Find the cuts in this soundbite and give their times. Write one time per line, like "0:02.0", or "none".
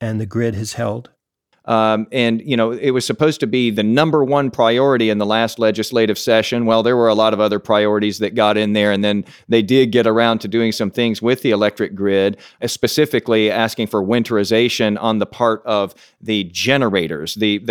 0:01.5